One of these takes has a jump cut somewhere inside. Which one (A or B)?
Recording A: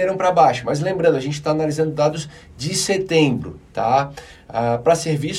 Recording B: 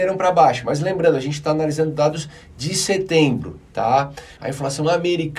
B